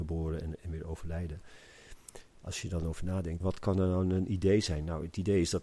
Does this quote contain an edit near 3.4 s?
yes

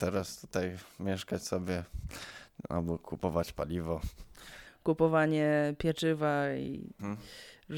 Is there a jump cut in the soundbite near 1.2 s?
no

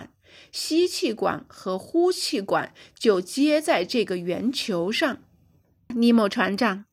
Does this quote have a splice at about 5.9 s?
yes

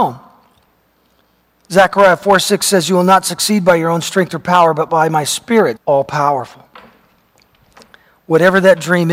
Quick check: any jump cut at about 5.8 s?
yes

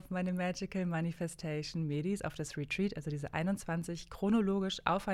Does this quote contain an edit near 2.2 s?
no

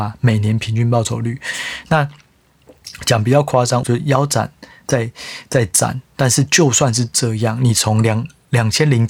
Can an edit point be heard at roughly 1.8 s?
no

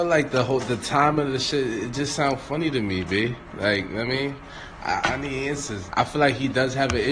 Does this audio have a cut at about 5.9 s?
yes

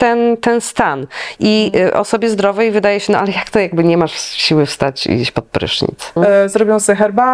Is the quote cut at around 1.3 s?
no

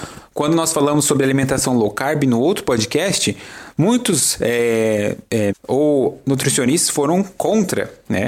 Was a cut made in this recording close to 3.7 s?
no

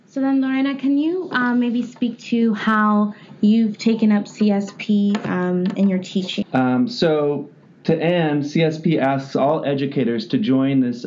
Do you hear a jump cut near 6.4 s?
yes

